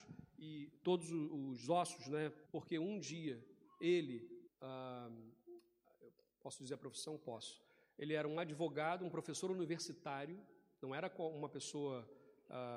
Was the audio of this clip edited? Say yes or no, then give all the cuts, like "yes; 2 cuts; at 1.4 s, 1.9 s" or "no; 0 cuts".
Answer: yes; 2 cuts; at 2.5 s, 4.5 s